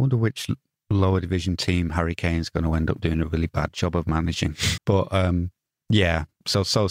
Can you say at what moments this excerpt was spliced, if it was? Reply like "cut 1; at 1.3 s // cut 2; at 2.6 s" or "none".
cut 1; at 4.8 s

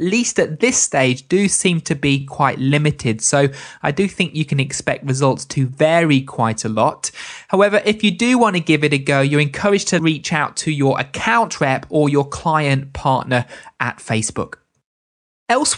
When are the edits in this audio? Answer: none

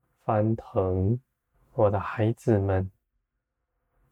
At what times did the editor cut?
cut 1; at 1.5 s

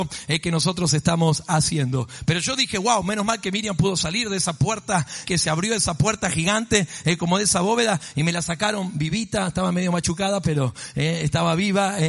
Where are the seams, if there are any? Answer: cut 1; at 5.2 s

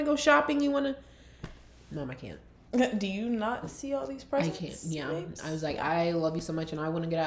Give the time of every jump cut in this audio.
none

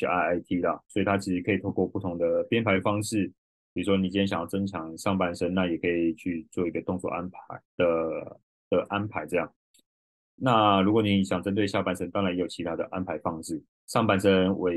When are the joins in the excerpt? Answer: cut 1; at 13.7 s

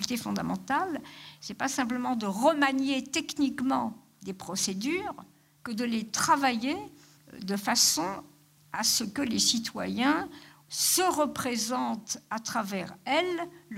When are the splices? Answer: cut 1; at 5.6 s // cut 2; at 10.6 s

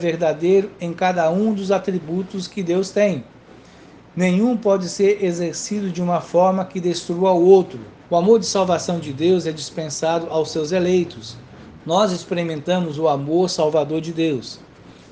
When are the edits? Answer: cut 1; at 8.0 s // cut 2; at 11.8 s

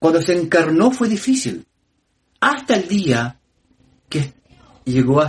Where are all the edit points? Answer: none

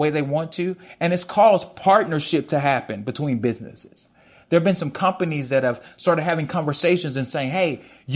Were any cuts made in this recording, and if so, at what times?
none

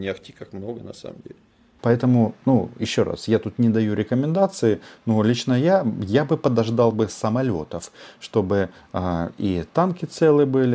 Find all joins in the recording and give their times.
cut 1; at 1.8 s

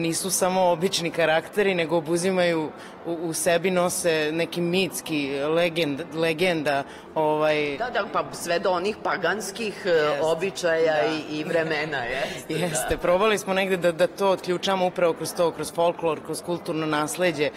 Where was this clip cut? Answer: none

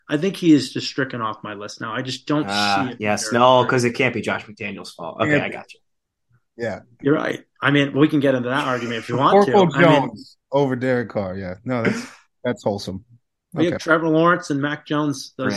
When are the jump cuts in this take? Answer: none

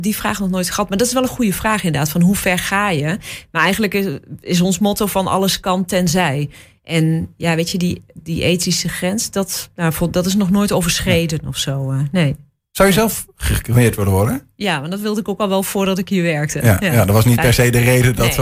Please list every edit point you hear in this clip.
none

